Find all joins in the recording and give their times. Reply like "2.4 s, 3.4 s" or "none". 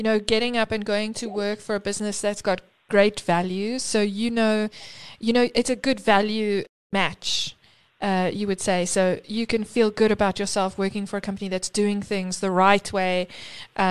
none

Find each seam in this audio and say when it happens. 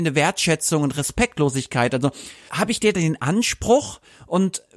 2.5 s

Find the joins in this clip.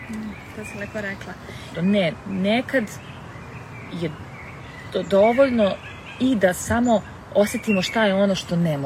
1.7 s

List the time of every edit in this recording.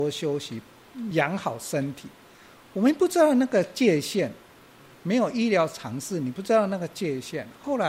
none

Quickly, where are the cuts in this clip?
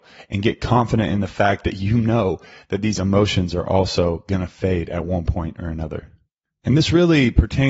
none

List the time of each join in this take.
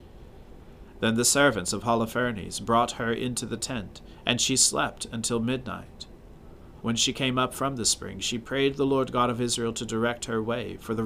6.8 s

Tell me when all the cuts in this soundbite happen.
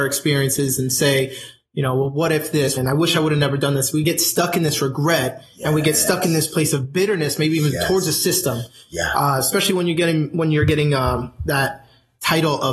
2.8 s

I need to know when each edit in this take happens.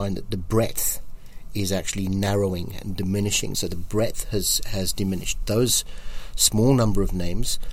3.5 s

